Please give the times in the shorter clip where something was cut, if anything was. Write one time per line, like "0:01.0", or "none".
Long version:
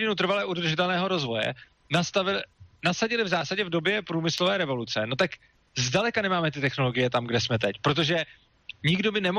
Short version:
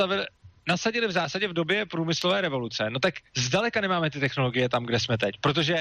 0:03.3